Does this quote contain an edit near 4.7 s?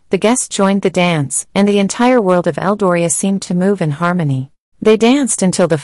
yes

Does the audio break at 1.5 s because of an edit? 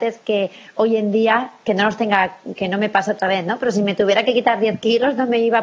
no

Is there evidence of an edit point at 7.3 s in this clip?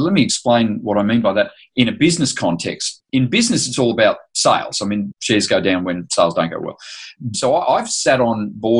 yes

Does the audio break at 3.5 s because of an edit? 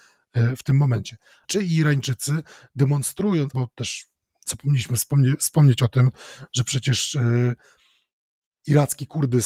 yes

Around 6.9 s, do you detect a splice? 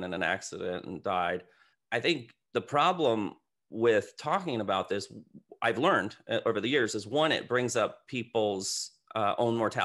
no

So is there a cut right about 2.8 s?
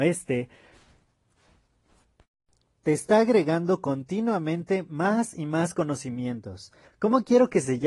no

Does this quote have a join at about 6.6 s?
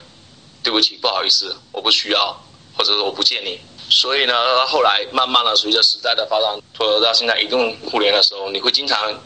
yes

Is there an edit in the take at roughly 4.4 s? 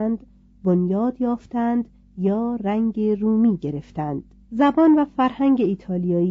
yes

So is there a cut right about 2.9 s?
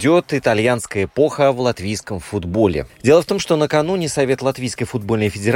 yes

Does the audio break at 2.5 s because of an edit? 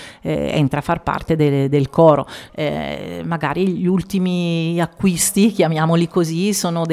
yes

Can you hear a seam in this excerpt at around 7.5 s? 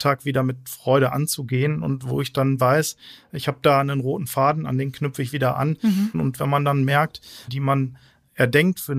yes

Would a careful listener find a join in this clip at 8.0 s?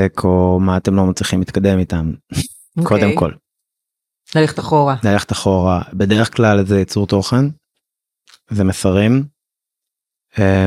no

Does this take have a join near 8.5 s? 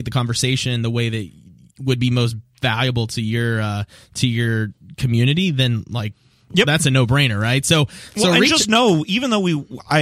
no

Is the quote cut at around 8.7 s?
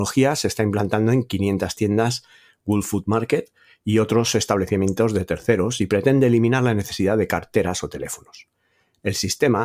no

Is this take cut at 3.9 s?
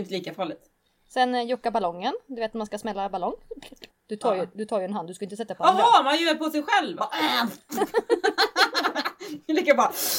yes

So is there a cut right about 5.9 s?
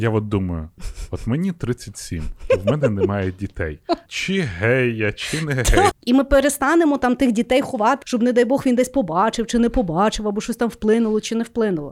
yes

